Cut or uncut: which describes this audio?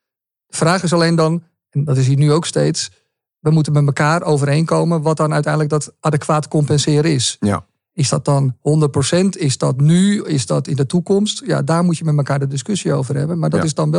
uncut